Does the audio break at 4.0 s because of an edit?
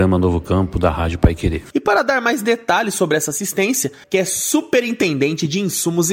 yes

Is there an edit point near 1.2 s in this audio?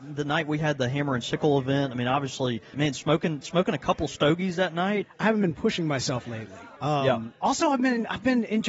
no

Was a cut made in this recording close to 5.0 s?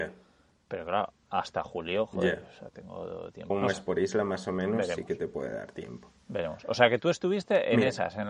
no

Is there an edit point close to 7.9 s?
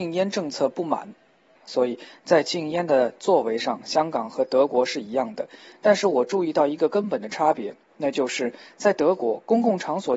no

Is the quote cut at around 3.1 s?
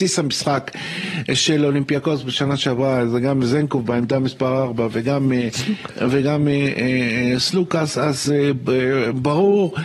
no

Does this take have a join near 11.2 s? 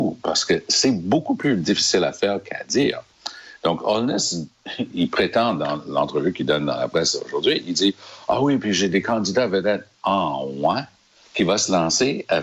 yes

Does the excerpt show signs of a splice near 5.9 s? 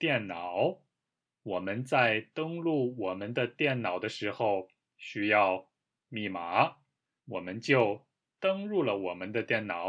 no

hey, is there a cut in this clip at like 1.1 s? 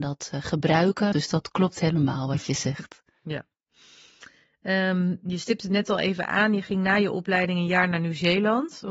yes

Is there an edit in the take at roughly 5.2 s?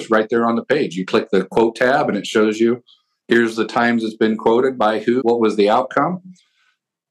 yes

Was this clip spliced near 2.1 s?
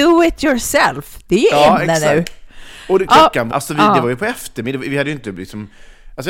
no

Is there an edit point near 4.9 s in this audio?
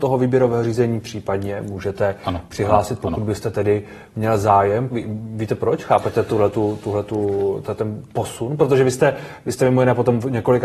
yes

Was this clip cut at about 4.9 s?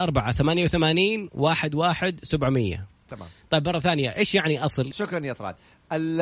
yes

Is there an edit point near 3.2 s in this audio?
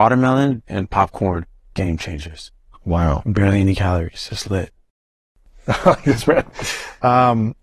no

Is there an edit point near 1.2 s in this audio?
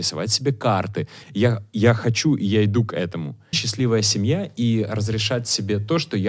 yes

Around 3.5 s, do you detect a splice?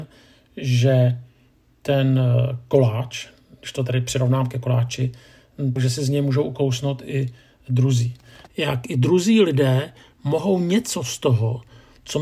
no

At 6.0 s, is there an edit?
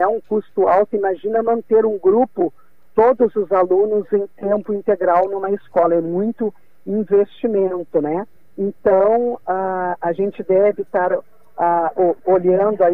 no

